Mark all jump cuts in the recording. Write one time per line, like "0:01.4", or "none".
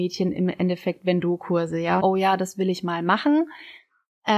0:02.0